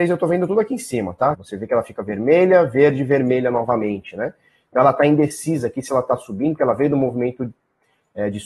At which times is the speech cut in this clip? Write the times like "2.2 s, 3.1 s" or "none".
1.3 s